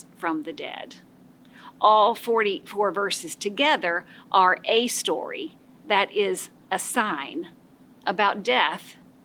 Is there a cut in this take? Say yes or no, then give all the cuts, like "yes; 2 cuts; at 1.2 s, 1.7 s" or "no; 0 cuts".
no; 0 cuts